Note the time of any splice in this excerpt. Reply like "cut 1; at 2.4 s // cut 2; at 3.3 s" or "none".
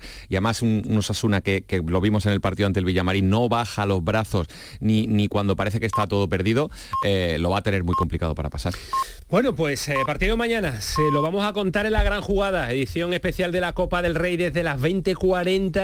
none